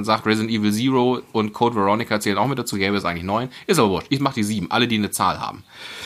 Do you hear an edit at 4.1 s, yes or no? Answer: no